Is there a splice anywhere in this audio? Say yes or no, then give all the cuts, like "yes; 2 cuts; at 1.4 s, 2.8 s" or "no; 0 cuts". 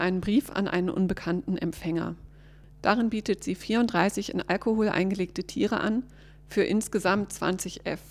no; 0 cuts